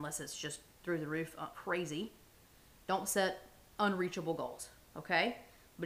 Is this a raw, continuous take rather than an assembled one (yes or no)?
no